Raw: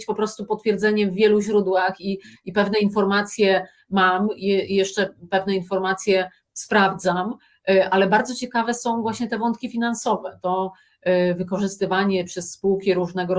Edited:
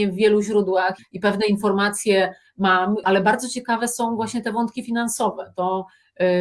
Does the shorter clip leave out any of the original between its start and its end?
yes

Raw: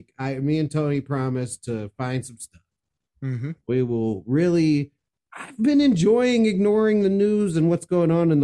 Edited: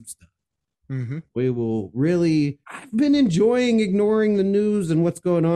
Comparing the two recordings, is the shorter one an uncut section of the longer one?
no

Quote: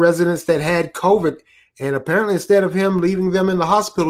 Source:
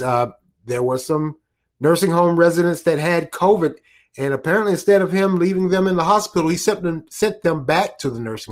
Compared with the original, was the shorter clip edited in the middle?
no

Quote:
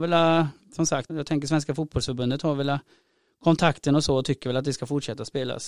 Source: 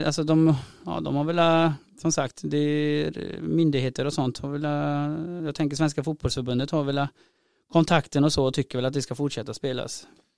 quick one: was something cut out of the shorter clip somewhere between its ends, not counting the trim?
yes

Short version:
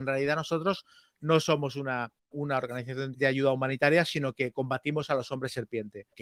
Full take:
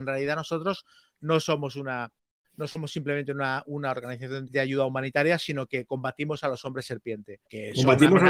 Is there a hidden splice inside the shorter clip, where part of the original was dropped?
yes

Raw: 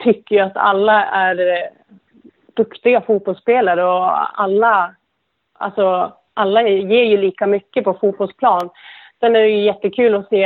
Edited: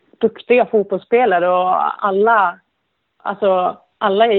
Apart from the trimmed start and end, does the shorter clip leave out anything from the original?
no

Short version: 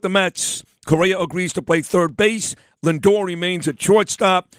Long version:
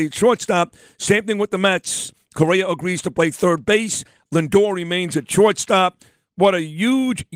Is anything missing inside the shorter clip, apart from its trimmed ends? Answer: no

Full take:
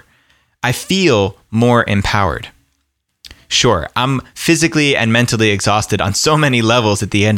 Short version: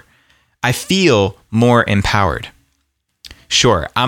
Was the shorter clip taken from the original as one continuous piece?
yes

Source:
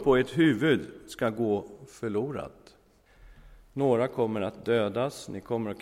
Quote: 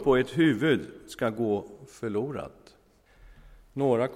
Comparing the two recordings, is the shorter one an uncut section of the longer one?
yes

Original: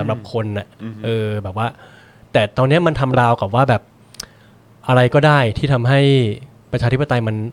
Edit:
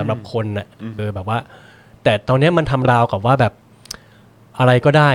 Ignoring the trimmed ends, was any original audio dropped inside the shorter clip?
yes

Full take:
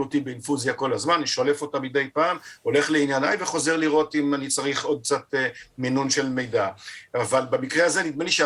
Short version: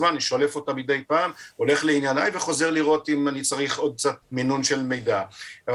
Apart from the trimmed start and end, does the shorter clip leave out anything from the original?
yes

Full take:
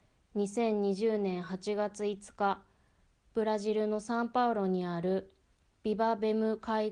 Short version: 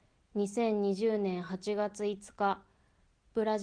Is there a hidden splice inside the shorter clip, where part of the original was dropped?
no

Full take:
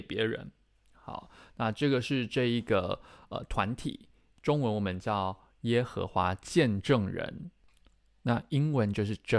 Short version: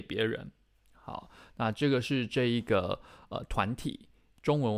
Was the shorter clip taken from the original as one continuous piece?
yes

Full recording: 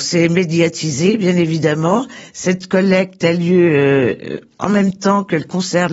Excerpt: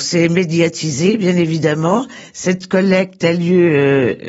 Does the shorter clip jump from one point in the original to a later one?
no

